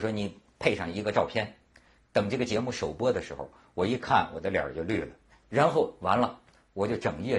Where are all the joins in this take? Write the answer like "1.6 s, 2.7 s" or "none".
5.3 s